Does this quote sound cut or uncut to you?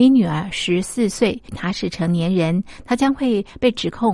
cut